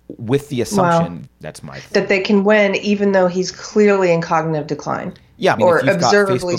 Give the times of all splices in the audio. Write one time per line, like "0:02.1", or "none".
0:01.3
0:05.6